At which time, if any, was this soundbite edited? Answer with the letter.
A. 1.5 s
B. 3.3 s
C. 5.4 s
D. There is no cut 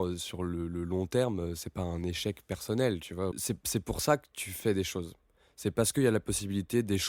B